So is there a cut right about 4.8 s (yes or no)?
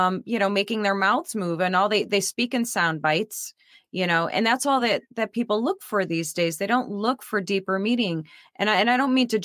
no